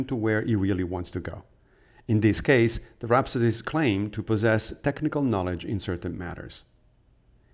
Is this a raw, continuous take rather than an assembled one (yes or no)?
yes